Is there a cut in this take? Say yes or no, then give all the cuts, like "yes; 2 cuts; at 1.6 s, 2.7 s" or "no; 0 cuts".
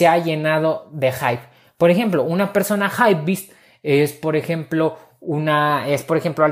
no; 0 cuts